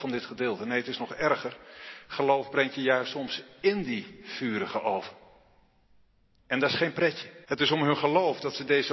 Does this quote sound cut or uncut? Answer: cut